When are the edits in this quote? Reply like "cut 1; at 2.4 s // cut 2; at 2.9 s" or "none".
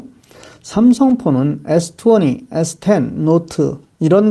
none